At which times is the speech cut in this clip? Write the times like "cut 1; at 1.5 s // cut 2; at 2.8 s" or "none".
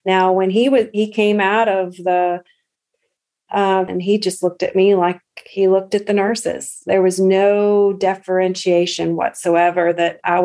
cut 1; at 3.9 s